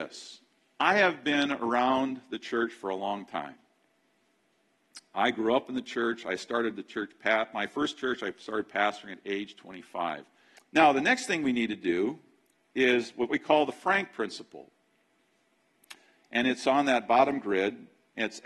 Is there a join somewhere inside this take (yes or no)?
yes